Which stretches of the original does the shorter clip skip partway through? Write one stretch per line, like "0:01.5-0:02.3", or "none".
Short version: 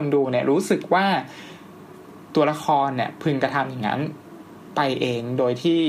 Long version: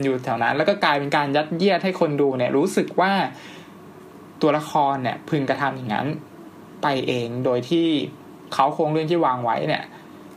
none